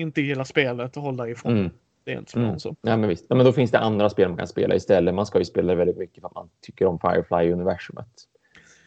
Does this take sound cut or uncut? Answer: uncut